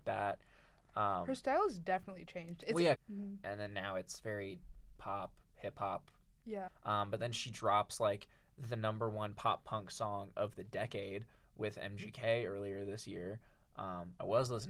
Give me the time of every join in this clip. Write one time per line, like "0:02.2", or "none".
0:03.0
0:06.7